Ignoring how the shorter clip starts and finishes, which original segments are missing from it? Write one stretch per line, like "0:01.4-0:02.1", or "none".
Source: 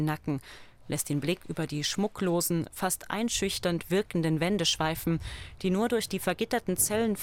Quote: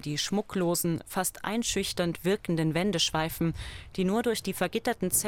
none